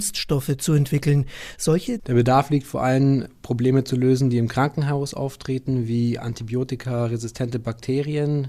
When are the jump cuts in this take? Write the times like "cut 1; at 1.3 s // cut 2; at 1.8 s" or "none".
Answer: cut 1; at 2.0 s